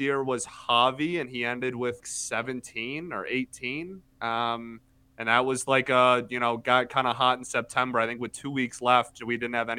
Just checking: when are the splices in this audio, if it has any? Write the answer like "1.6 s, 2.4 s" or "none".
2.0 s